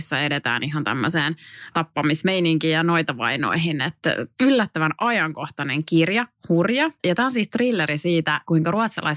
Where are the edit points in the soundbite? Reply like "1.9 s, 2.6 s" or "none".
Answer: 7.0 s